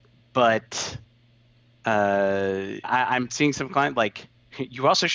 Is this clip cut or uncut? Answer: cut